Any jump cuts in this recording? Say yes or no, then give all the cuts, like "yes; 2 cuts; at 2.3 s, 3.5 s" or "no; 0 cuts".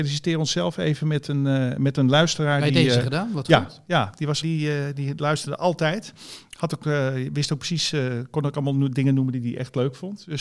yes; 1 cut; at 4.4 s